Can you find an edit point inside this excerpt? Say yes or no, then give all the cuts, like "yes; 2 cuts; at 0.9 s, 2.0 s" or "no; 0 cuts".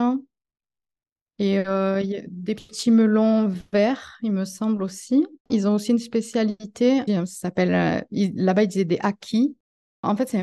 yes; 2 cuts; at 5.4 s, 7.1 s